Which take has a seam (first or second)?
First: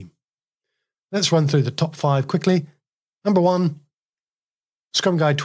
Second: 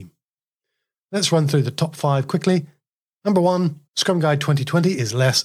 second